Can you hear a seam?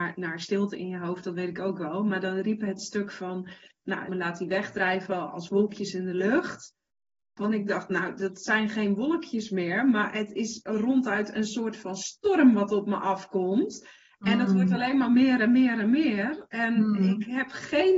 yes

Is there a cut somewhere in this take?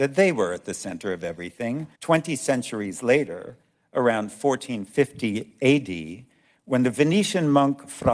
yes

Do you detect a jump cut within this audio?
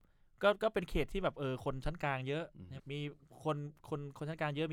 yes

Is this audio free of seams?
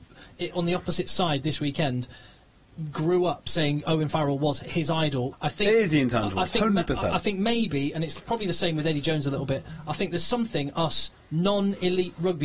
no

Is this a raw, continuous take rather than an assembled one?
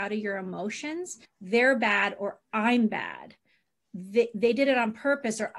no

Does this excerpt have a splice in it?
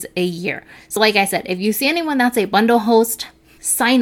no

